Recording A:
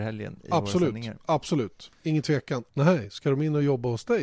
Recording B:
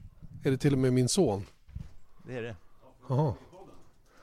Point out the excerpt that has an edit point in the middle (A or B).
A